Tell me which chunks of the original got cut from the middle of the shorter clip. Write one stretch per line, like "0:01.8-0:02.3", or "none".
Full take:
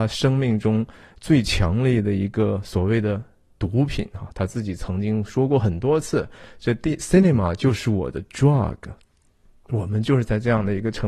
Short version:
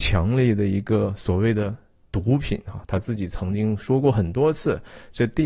none